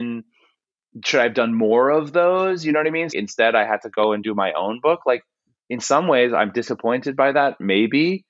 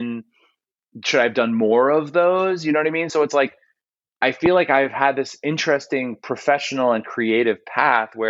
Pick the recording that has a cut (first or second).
first